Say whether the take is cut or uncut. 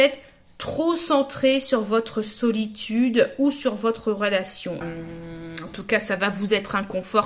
cut